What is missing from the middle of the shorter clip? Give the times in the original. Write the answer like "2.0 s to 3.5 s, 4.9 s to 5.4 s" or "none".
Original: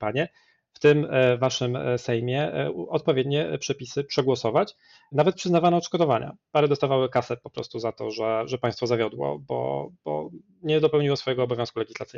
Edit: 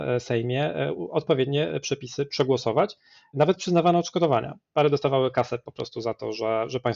none

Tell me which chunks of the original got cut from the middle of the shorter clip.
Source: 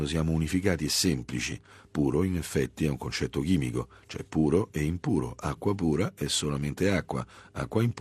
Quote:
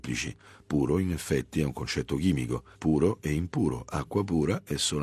4.0 s to 4.3 s

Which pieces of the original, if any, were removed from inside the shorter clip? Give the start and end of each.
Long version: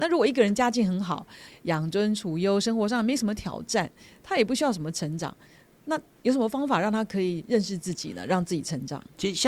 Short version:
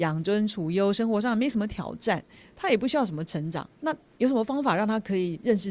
5.4 s to 5.8 s

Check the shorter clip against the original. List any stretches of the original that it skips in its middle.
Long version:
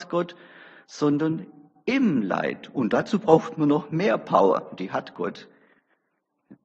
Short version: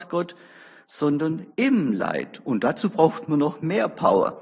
1.5 s to 1.8 s

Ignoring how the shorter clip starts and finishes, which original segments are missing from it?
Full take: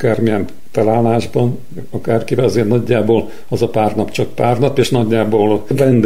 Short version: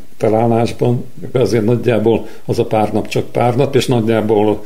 1.9 s to 2.4 s

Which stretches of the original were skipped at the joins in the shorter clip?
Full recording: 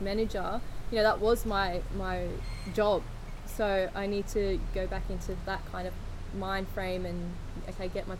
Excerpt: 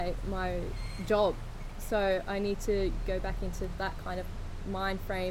none

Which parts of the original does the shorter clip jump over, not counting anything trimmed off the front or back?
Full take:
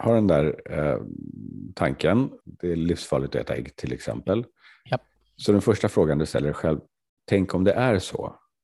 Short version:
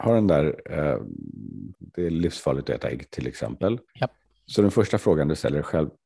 1.7 s to 2.4 s, 4.5 s to 4.8 s

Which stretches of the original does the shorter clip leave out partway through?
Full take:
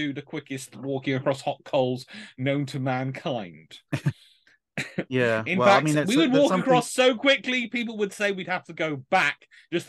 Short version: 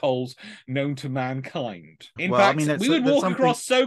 3.9 s to 5.4 s

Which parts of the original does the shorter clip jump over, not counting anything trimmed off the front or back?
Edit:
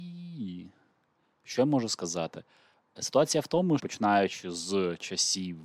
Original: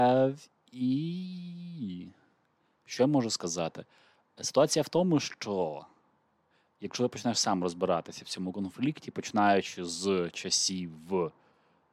5.2 s to 9.1 s

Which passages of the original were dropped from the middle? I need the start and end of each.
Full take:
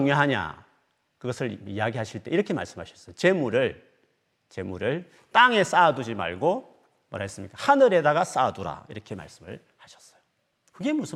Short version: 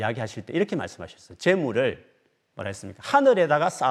4.3 s to 7.1 s

